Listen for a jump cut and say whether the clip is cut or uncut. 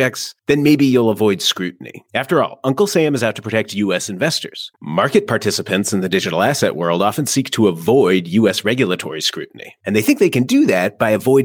cut